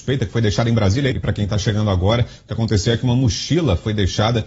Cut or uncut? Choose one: cut